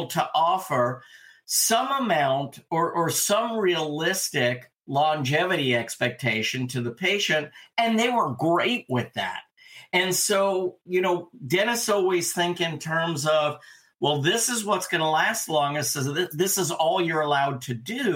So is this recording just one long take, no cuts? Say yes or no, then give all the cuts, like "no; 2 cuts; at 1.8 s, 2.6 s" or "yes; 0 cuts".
yes; 0 cuts